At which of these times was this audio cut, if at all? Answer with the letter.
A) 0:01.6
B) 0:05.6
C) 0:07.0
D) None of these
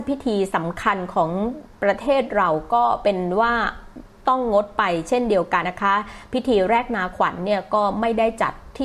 B